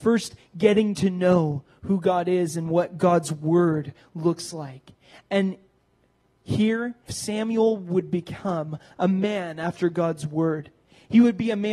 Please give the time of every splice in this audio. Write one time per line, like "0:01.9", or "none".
0:07.1